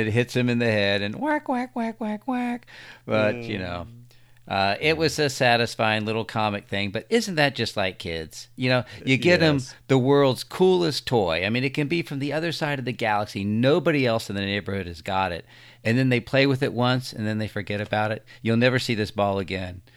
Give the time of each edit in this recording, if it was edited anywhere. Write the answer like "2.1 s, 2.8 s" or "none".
none